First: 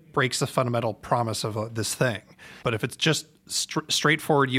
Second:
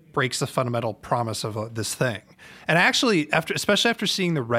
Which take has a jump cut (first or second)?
first